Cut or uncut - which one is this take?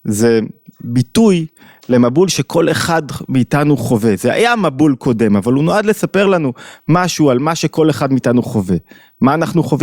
uncut